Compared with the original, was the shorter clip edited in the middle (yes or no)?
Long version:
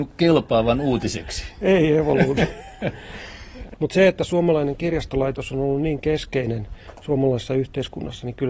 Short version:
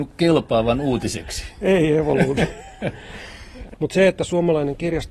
no